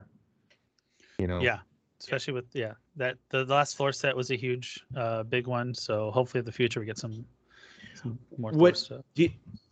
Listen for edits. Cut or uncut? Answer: uncut